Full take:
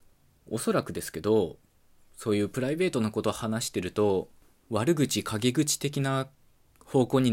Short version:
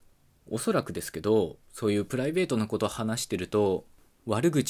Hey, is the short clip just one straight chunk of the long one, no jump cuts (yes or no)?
no